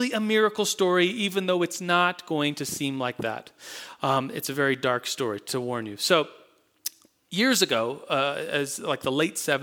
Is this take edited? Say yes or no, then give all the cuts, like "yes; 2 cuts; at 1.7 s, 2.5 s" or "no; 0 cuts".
no; 0 cuts